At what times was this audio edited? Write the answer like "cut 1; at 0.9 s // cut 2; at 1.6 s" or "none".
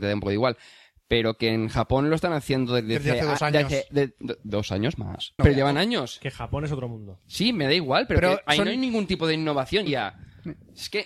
cut 1; at 5.4 s // cut 2; at 9.9 s